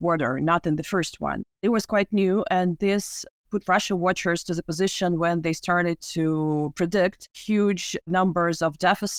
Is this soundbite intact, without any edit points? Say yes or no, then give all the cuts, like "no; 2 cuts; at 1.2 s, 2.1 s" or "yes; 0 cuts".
yes; 0 cuts